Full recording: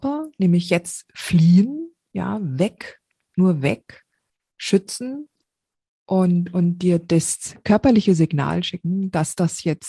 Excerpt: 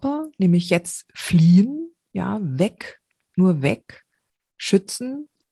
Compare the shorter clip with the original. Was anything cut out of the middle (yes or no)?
no